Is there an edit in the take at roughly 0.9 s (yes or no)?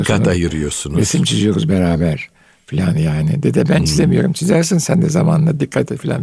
no